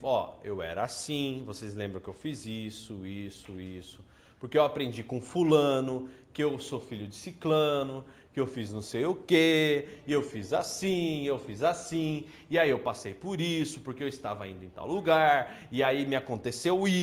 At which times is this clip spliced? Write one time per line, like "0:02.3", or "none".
none